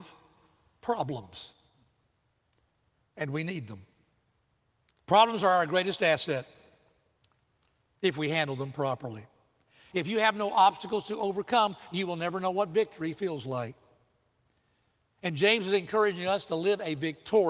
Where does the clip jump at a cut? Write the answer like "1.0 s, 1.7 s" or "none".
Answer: 9.9 s